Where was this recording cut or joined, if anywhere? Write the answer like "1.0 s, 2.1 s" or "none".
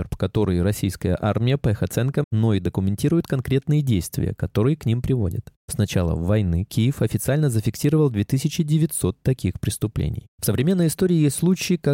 2.2 s